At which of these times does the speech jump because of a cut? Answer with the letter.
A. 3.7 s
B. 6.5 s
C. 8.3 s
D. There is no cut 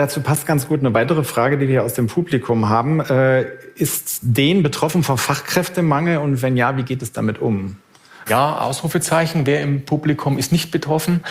C